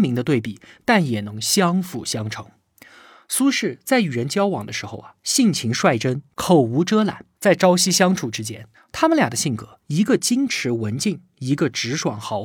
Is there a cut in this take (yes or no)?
yes